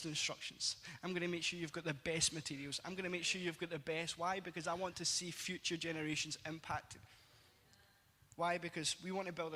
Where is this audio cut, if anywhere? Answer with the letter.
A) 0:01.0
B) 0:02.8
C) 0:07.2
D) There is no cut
D